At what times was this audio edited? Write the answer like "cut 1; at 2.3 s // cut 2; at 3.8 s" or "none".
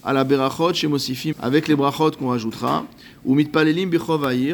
cut 1; at 1.3 s